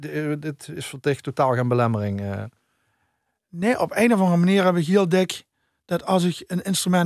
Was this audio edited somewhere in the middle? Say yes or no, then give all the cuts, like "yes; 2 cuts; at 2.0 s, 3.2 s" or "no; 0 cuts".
no; 0 cuts